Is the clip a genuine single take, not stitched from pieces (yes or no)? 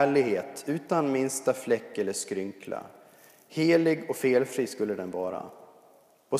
yes